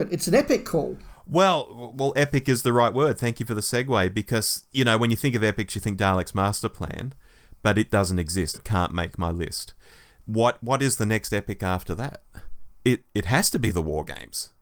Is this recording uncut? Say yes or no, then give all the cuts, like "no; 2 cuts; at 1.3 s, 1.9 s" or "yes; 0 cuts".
no; 1 cut; at 8.5 s